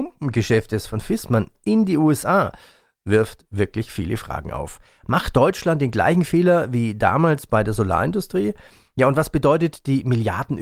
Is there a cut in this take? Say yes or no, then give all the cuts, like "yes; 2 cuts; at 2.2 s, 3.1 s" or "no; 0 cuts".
no; 0 cuts